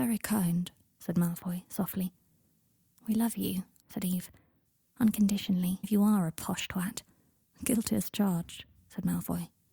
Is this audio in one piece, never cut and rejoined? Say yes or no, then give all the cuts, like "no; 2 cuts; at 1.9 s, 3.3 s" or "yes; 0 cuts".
no; 1 cut; at 5.8 s